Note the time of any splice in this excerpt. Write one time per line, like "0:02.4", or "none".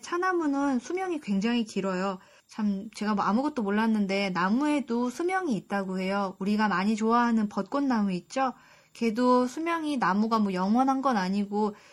0:02.4